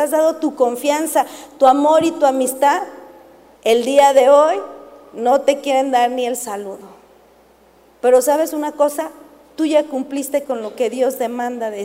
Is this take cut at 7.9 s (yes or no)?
no